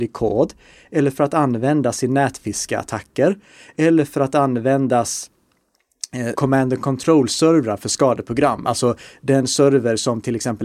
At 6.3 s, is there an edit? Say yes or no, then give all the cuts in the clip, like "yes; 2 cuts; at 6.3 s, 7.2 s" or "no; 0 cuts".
yes; 1 cut; at 6.3 s